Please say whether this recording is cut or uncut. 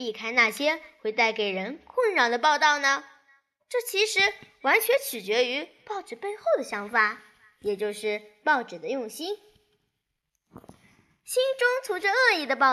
uncut